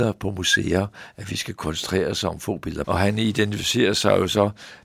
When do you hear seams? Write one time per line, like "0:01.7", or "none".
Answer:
0:02.8